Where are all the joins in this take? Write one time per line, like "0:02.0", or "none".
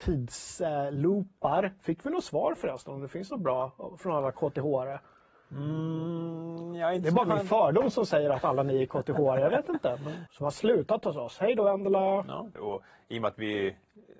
0:10.3
0:12.6